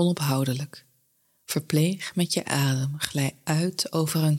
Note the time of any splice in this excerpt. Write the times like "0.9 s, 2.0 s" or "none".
none